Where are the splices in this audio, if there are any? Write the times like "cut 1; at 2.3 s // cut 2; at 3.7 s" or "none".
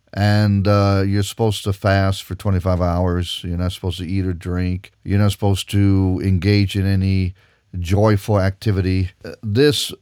cut 1; at 4.9 s